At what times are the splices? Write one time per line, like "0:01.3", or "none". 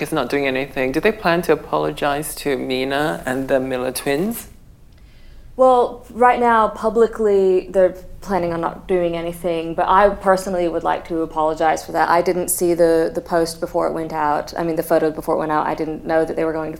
none